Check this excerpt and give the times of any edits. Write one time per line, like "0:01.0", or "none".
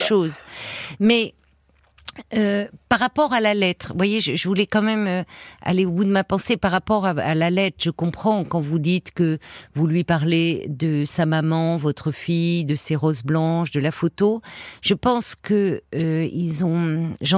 none